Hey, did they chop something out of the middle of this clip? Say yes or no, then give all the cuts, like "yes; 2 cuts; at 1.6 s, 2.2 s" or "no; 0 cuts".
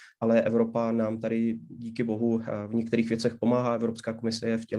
no; 0 cuts